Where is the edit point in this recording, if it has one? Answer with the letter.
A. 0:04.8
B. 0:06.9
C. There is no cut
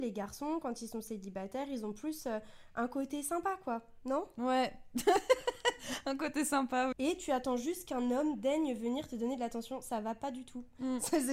B